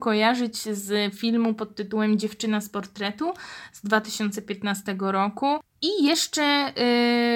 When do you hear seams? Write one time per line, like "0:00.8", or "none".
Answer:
0:05.6